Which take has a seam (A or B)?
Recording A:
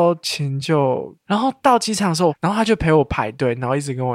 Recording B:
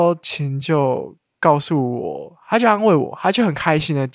A